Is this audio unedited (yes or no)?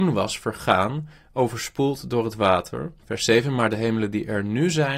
no